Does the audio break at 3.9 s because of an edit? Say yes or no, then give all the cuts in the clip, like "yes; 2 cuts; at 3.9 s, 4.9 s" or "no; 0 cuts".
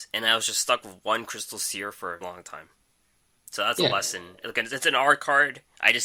no; 1 cut; at 2.2 s